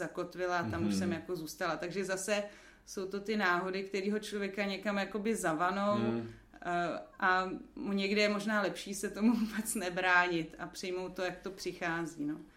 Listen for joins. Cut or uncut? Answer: uncut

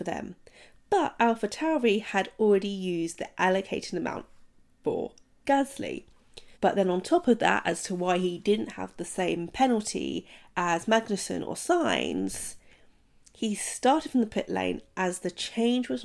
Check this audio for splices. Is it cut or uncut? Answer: cut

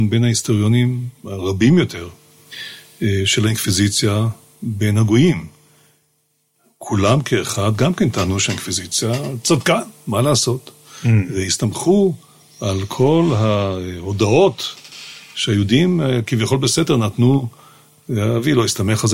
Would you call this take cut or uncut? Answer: uncut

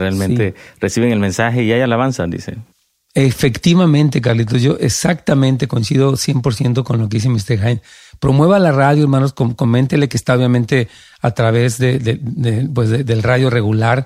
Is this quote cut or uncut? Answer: uncut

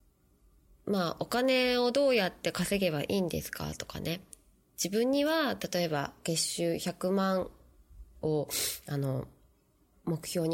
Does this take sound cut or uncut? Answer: uncut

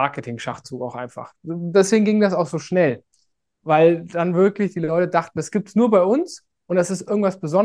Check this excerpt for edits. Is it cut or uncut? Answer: uncut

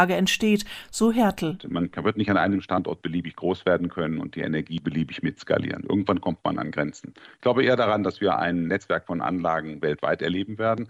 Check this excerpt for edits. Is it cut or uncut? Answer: uncut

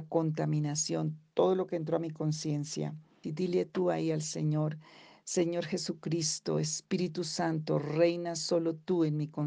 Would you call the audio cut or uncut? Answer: cut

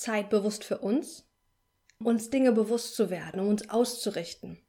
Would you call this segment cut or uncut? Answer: cut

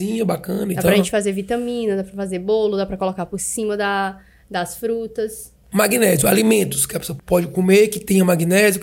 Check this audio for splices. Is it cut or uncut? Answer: cut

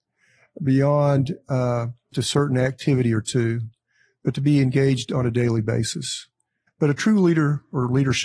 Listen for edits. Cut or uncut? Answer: cut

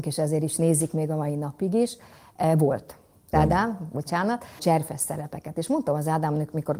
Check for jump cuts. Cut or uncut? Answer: cut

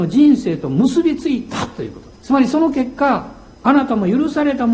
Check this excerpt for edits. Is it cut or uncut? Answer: cut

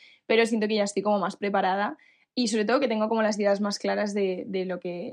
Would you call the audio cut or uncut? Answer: uncut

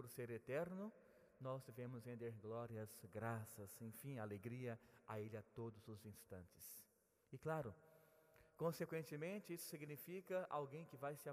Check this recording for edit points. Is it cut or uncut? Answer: uncut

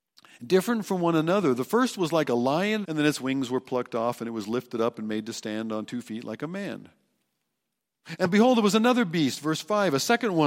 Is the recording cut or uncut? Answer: cut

